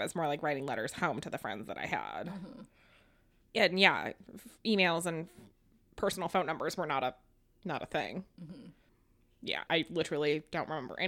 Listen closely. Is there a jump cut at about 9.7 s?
yes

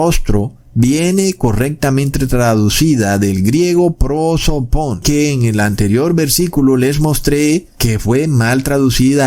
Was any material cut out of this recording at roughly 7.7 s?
yes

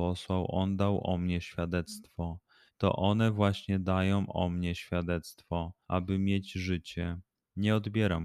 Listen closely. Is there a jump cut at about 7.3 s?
no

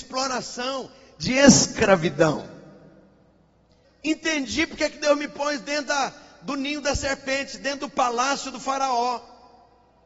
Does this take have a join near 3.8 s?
yes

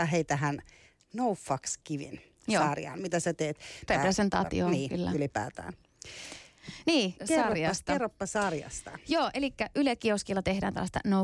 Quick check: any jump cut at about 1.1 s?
no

